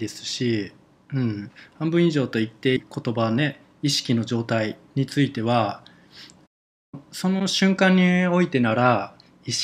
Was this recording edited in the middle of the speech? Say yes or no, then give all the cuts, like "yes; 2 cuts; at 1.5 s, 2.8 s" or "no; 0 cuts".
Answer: yes; 1 cut; at 2.8 s